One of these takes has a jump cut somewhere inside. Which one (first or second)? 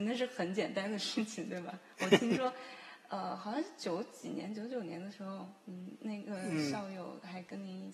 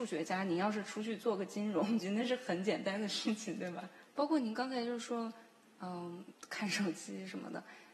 second